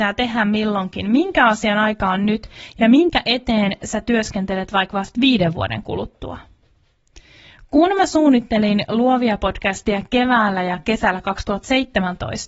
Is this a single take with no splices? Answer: yes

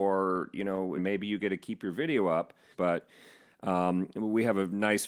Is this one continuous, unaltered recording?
no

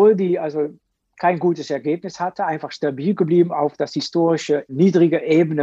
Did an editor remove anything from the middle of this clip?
no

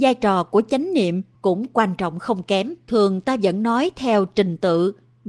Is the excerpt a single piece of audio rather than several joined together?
no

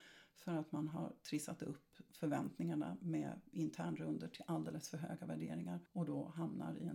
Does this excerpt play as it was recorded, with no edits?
no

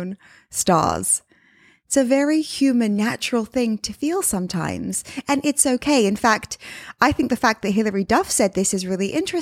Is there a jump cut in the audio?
no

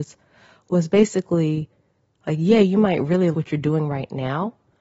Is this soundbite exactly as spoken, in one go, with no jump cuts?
no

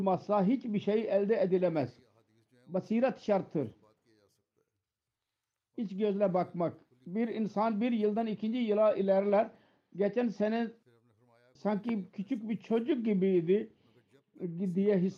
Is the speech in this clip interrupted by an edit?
no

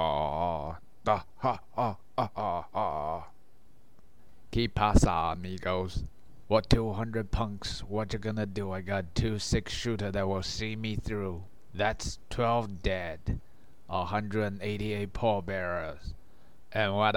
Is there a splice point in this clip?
yes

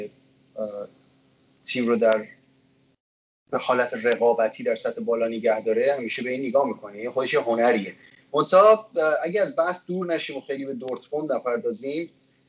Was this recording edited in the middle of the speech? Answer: no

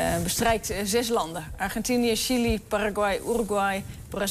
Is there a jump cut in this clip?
no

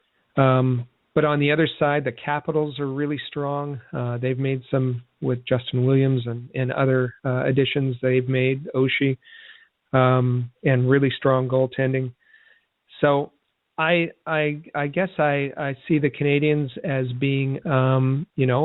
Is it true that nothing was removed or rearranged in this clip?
no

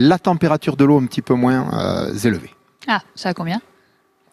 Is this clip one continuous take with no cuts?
yes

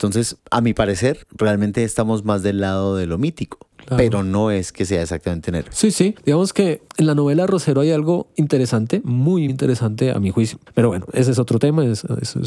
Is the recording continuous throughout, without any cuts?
no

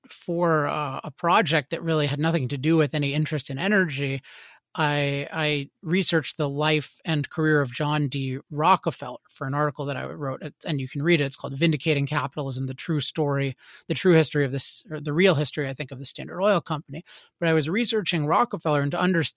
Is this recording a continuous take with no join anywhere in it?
yes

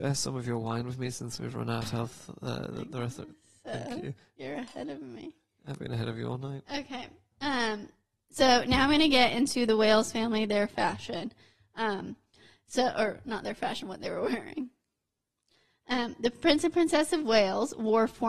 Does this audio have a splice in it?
no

